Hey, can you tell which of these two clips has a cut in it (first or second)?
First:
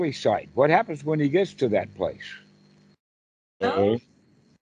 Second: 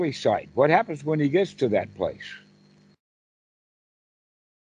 first